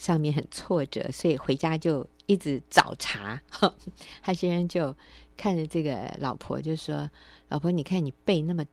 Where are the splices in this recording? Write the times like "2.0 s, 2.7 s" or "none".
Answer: none

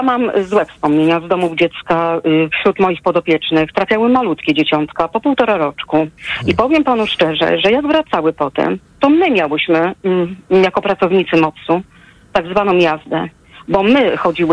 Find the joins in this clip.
none

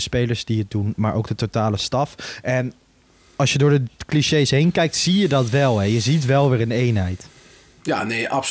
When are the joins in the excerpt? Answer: none

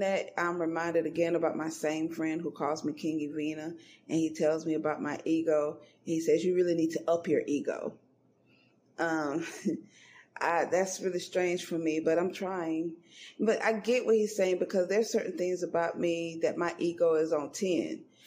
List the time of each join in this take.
none

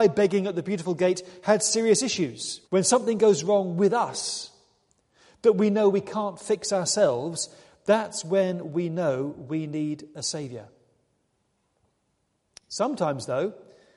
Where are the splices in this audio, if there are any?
2.6 s

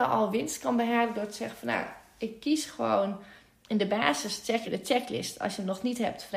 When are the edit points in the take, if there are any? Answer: 4.6 s

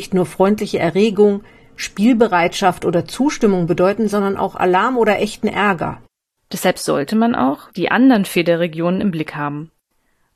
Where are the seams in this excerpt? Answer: 7.7 s

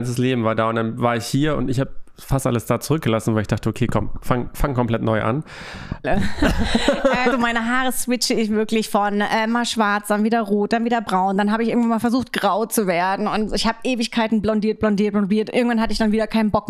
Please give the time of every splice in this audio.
6.0 s, 7.3 s

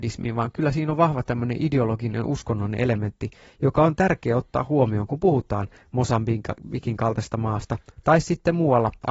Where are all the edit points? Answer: none

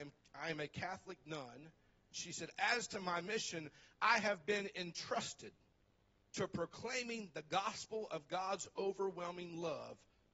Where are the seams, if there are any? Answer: 2.1 s

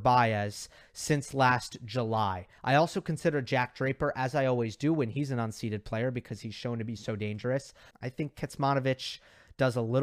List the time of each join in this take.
2.6 s, 7.9 s

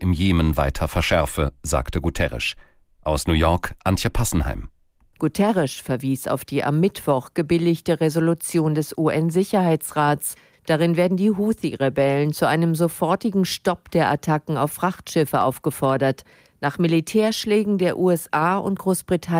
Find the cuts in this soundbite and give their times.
none

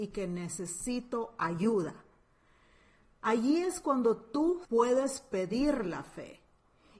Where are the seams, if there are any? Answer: 4.6 s

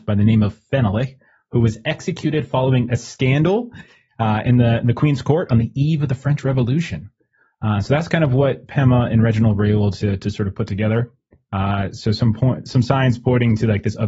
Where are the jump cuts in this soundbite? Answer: none

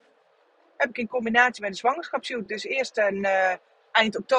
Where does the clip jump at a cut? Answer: none

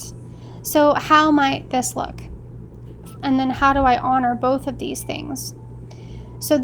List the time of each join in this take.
3.2 s

